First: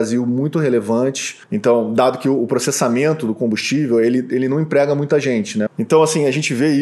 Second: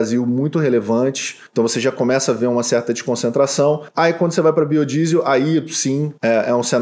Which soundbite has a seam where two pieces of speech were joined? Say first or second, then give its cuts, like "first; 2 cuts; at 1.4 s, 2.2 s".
first; 2 cuts; at 1.4 s, 5.7 s